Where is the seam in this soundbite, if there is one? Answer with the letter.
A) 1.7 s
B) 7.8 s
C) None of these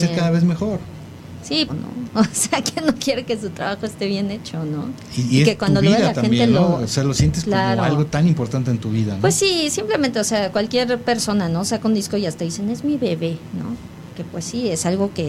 A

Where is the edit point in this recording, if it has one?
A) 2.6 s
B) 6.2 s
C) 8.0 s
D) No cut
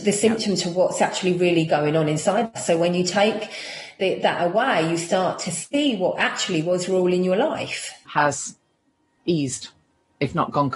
C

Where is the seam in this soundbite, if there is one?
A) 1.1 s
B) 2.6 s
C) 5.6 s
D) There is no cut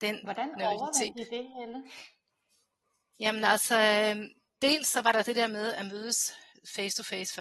D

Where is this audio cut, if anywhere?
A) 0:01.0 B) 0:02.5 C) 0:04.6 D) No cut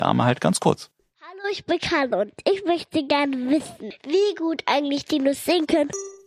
A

